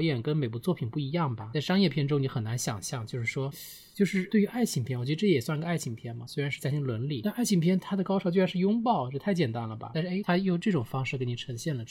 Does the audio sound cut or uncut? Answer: uncut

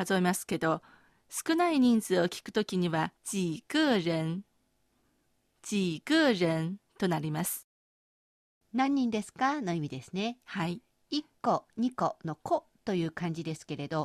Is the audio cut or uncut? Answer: cut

